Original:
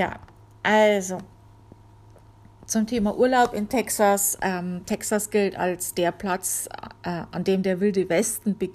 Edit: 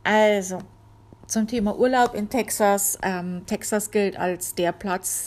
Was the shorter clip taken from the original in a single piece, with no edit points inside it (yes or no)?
no